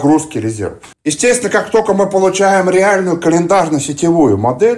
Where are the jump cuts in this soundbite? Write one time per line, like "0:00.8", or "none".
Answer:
0:00.9

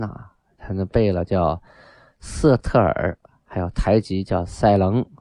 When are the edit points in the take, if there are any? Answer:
none

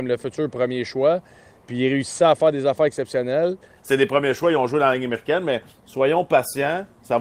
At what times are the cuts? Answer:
0:03.8

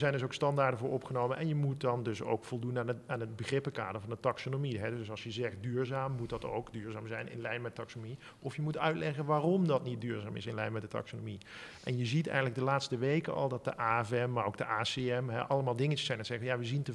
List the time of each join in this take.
none

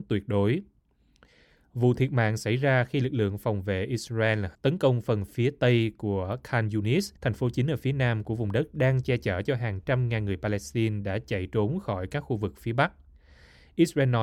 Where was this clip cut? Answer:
0:04.5
0:07.2

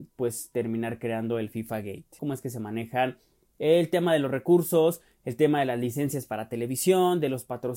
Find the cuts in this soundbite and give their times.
0:02.2

